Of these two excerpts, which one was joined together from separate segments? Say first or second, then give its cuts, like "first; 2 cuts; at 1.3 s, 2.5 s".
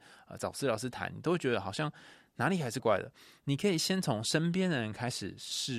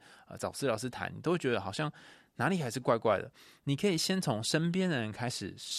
first; 1 cut; at 2.8 s